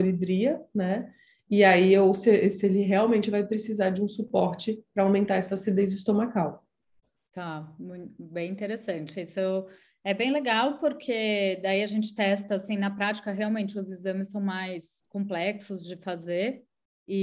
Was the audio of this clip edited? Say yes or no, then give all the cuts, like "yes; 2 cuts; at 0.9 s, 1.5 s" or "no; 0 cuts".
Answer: no; 0 cuts